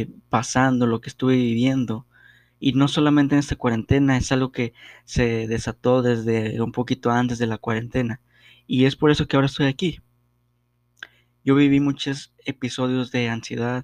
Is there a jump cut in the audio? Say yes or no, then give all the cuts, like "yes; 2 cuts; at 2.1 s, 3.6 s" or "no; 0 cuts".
no; 0 cuts